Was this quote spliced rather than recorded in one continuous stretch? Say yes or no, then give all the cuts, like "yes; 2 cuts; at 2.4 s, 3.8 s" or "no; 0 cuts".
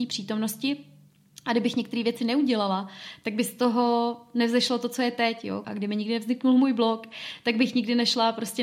yes; 1 cut; at 5.6 s